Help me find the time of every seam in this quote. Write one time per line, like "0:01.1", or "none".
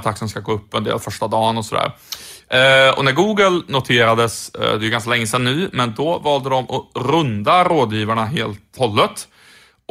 0:08.8